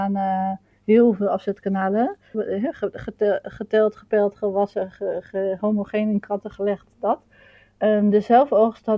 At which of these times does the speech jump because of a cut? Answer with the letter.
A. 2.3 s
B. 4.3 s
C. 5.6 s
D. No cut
A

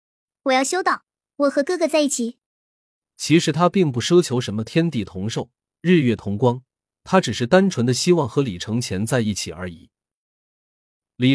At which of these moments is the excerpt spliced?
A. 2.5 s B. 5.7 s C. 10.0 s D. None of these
A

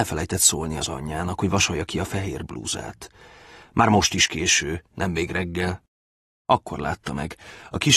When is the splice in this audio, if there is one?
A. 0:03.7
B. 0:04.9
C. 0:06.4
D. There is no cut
D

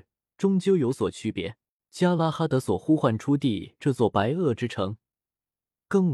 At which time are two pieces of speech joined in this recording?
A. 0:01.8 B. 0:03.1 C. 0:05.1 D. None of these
A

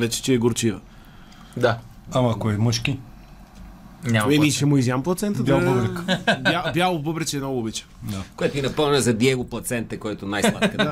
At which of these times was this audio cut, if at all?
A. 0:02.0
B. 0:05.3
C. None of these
C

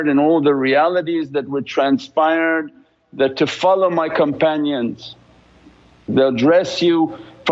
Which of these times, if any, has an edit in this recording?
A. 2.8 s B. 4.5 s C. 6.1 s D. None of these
C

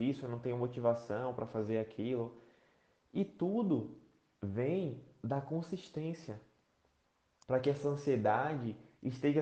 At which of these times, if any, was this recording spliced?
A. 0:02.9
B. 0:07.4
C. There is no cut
B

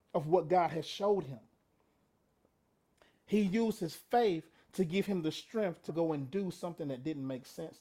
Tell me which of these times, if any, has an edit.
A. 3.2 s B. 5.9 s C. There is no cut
B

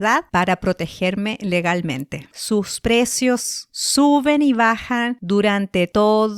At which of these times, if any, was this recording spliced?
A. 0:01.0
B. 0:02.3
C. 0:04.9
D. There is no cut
B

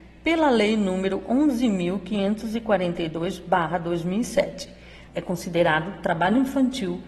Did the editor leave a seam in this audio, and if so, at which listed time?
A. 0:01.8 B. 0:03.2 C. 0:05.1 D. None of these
C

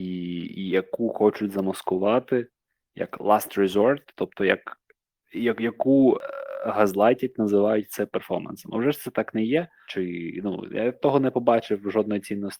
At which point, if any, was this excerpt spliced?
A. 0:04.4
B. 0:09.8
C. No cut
B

